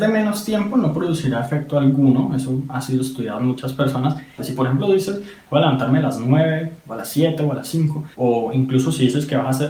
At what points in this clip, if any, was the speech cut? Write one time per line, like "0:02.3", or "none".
0:04.4
0:08.1